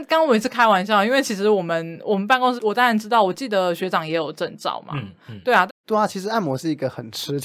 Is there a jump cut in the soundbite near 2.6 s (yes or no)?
yes